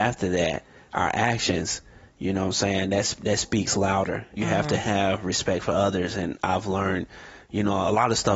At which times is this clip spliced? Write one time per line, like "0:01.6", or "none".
0:04.4